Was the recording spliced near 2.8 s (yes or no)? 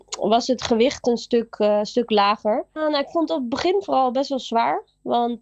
yes